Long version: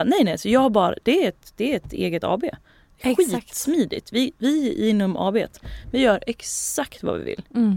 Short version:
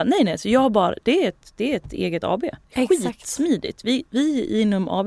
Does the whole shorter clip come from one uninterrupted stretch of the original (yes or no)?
no